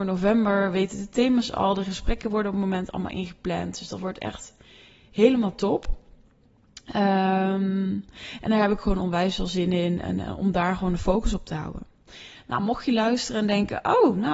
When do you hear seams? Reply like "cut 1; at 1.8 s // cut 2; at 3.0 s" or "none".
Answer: none

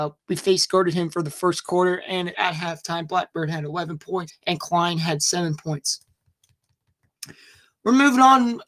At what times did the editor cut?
cut 1; at 2.3 s // cut 2; at 4.3 s

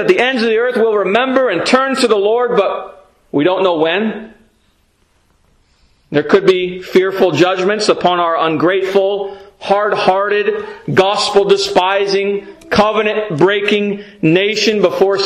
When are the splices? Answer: none

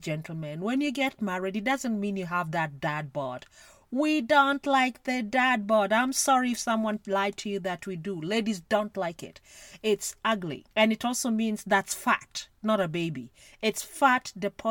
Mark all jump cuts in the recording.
cut 1; at 10.7 s

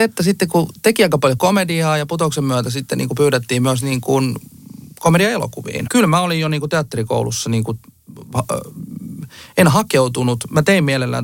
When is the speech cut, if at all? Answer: cut 1; at 5.9 s

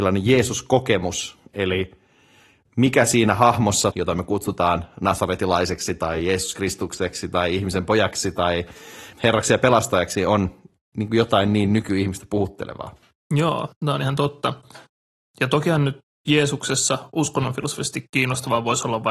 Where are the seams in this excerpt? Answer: cut 1; at 3.9 s // cut 2; at 9.1 s

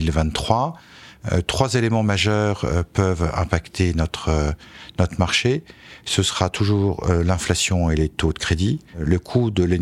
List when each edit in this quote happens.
cut 1; at 8.9 s

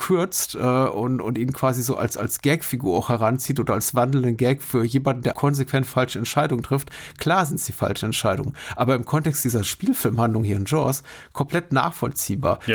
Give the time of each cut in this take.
cut 1; at 5.3 s

